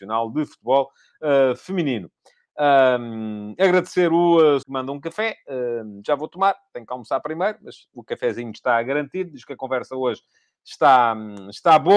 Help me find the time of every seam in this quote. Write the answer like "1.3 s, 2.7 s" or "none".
4.6 s